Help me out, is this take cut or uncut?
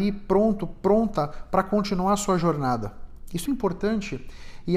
cut